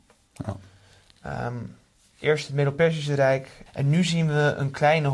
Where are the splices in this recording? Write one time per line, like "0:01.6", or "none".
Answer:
0:03.7